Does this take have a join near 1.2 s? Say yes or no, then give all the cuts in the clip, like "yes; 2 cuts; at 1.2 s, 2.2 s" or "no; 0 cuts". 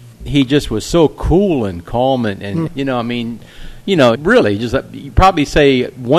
no; 2 cuts; at 2.7 s, 4.2 s